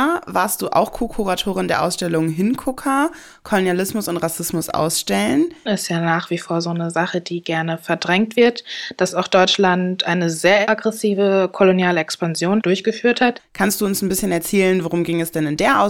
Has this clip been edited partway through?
yes; 2 cuts; at 5.7 s, 13.4 s

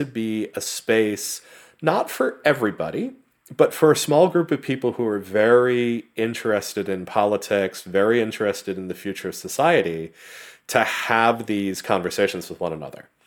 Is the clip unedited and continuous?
yes; 0 cuts

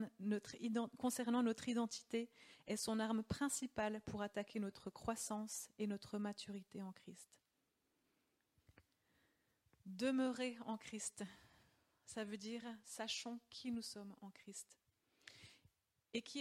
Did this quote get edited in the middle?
no; 0 cuts

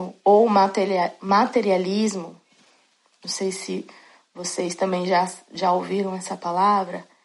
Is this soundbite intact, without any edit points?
yes; 0 cuts

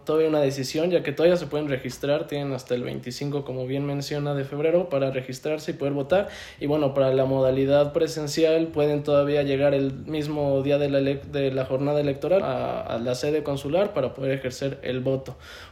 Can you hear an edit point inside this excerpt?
yes; 1 cut; at 12.4 s

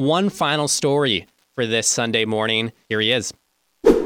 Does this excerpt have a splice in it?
yes; 1 cut; at 2.8 s

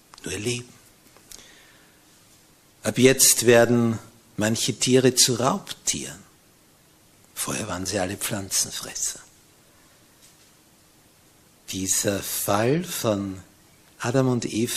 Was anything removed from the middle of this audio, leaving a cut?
no; 0 cuts

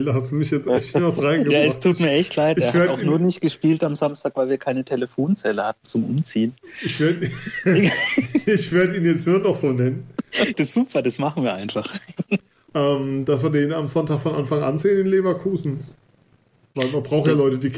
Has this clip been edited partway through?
yes; 2 cuts; at 10.5 s, 12.7 s

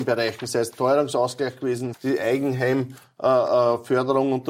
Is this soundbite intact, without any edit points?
no; 1 cut; at 1.9 s

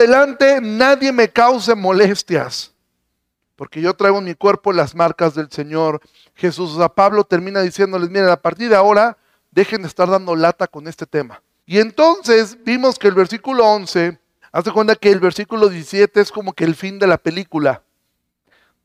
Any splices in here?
yes; 2 cuts; at 11.6 s, 14.4 s

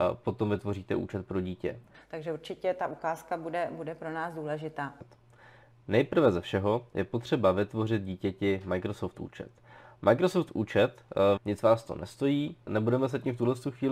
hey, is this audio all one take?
no; 3 cuts; at 1.9 s, 11.4 s, 12.7 s

